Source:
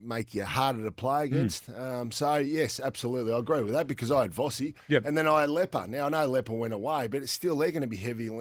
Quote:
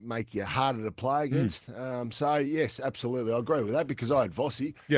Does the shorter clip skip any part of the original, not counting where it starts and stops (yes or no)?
no